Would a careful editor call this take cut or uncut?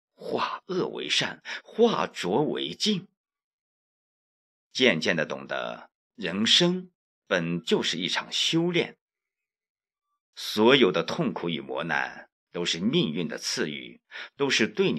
uncut